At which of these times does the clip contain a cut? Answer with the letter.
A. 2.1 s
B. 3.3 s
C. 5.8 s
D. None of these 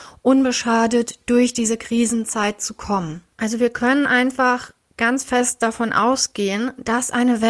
B